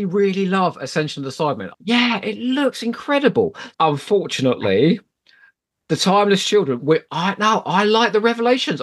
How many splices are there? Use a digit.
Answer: 2